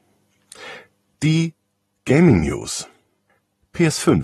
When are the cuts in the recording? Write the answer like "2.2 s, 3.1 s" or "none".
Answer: 1.2 s